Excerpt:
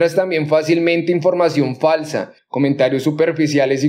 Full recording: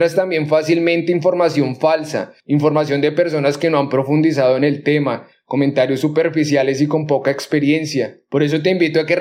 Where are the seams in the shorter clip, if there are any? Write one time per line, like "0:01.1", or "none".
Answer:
0:02.4